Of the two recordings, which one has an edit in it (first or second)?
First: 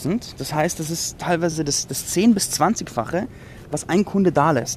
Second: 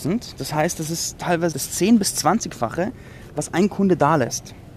second